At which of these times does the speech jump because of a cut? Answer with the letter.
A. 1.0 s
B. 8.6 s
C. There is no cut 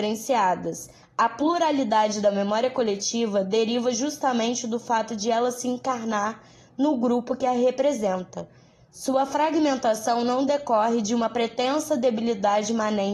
A